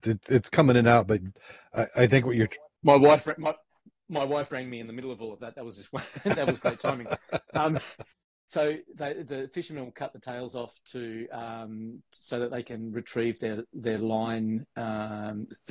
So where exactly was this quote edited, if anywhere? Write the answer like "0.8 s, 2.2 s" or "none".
none